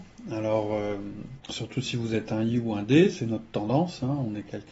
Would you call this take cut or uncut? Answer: cut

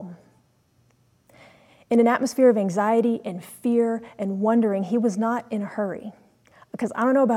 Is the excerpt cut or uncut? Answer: uncut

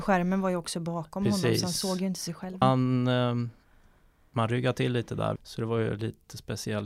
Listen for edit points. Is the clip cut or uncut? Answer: cut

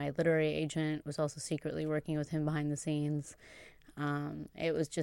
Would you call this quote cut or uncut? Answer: uncut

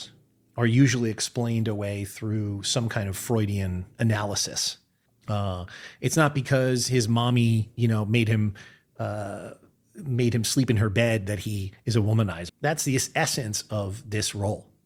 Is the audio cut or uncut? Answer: cut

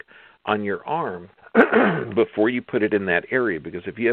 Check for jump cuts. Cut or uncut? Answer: cut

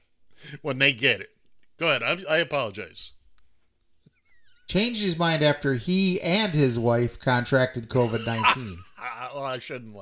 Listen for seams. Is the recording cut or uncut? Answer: uncut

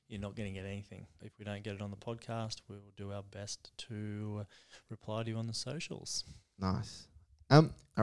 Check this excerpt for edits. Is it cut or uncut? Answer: cut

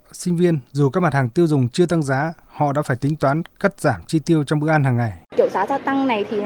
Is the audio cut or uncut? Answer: cut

